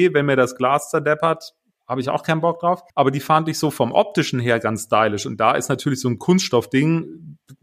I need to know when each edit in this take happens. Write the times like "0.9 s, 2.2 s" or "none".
2.9 s